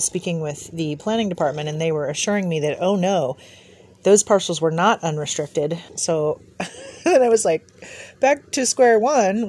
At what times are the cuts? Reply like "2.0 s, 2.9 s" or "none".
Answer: 5.9 s